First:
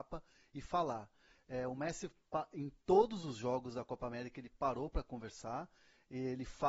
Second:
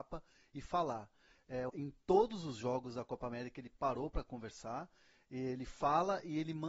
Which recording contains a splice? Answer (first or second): second